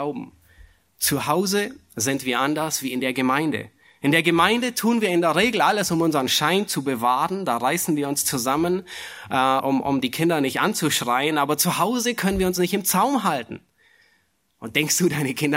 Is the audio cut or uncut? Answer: cut